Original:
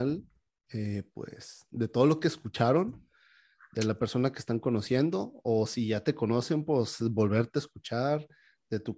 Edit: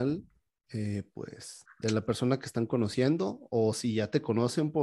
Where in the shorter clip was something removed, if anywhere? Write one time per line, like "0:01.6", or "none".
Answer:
0:01.7